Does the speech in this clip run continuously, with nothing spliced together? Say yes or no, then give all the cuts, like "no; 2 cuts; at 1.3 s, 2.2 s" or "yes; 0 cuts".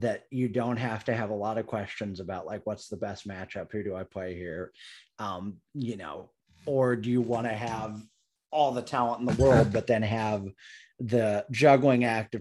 yes; 0 cuts